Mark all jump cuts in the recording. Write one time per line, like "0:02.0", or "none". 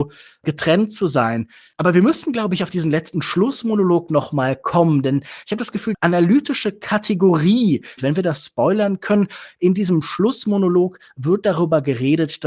0:05.9
0:08.0